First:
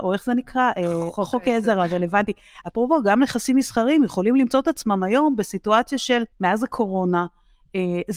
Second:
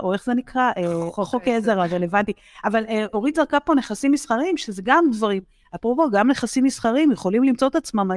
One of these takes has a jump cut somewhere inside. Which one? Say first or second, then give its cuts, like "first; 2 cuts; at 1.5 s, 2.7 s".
first; 2 cuts; at 2.6 s, 6.3 s